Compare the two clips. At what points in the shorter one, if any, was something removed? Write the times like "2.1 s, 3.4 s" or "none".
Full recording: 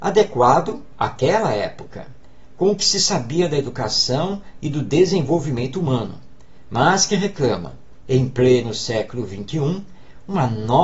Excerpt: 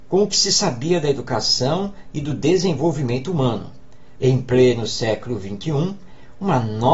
4.2 s